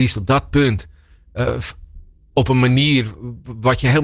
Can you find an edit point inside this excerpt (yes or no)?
no